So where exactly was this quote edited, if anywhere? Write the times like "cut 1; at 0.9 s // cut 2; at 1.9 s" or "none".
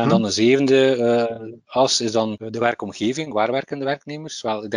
none